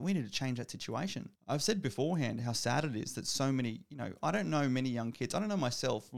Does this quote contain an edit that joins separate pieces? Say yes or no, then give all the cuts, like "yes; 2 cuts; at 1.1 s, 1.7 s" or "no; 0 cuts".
yes; 1 cut; at 1.4 s